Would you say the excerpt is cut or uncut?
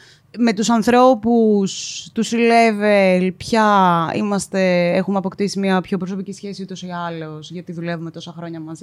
uncut